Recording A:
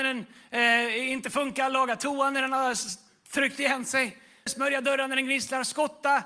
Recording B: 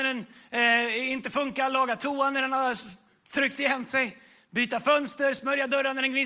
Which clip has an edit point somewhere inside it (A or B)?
A